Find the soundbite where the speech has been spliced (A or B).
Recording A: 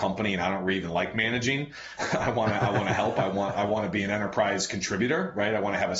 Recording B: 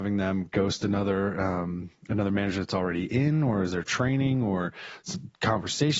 A